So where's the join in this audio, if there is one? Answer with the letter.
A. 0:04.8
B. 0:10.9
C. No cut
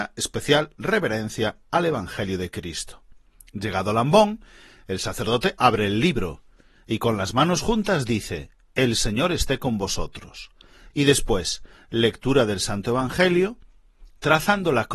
B